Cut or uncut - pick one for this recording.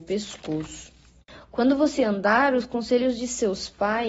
uncut